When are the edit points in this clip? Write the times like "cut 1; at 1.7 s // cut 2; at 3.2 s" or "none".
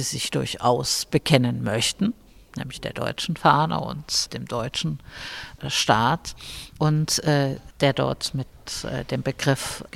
cut 1; at 7.7 s